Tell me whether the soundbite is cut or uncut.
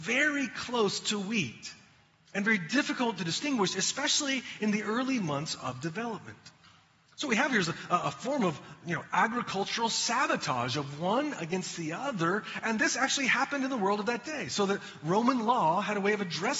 uncut